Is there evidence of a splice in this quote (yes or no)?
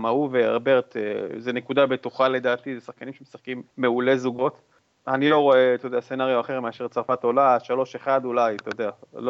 yes